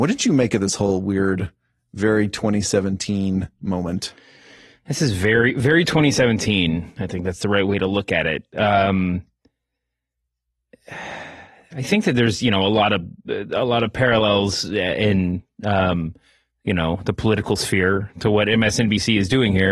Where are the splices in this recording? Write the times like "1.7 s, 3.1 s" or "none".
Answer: none